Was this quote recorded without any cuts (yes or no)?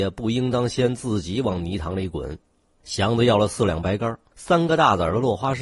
no